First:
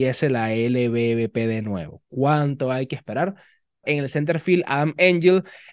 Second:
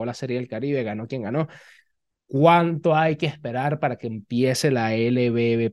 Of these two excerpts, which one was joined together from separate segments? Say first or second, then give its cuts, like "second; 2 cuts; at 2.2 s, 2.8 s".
first; 1 cut; at 3.8 s